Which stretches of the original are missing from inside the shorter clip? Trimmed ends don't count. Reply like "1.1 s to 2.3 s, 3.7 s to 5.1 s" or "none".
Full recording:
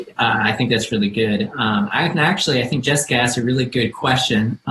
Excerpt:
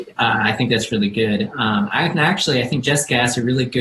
none